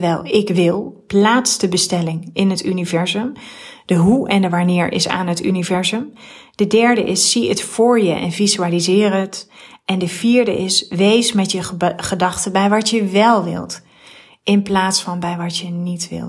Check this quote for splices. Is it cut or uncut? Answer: uncut